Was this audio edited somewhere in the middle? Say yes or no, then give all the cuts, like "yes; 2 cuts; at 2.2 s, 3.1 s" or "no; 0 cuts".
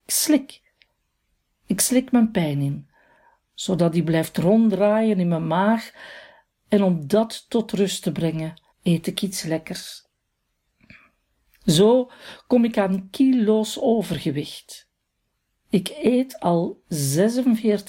yes; 1 cut; at 8.7 s